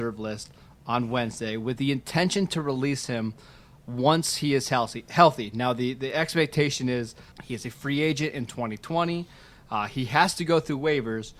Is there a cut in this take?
yes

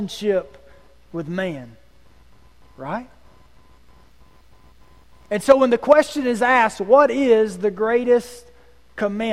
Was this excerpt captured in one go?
yes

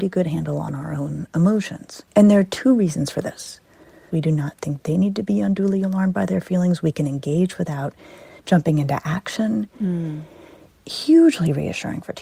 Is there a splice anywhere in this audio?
yes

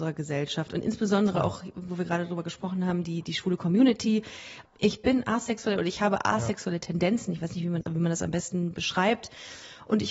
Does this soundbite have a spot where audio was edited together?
yes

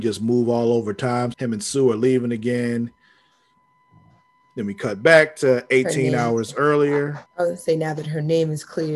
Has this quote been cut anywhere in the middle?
yes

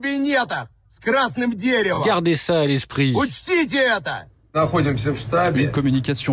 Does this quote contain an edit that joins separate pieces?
no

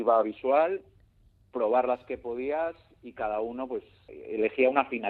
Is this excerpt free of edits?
yes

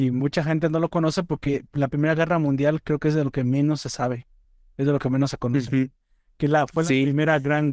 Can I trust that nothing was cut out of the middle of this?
yes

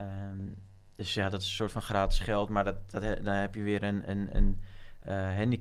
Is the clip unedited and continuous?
yes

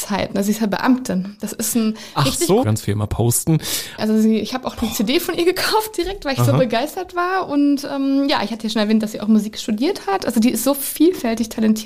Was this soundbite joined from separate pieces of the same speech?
yes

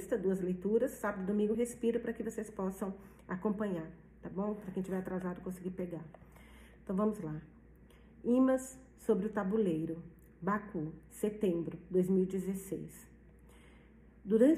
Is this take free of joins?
yes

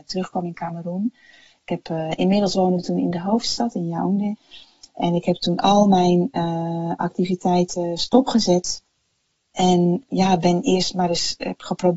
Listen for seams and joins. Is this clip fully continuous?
yes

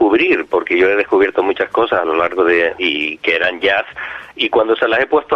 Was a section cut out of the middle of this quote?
yes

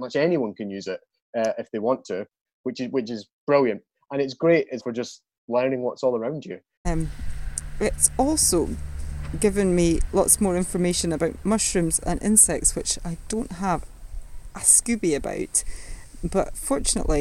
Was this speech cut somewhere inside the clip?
yes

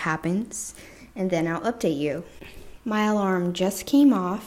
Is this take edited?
yes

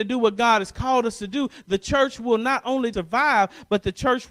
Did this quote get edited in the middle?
yes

